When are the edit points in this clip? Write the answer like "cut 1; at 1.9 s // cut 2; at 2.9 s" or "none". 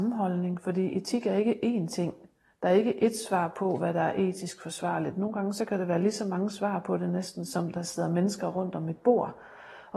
none